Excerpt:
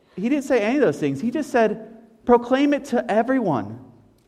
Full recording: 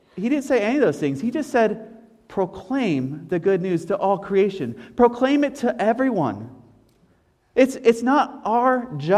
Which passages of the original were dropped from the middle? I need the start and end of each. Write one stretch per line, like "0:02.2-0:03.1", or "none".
0:02.2-0:04.9